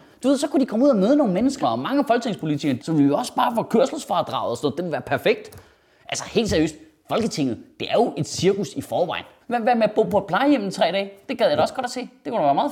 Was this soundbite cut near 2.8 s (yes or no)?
yes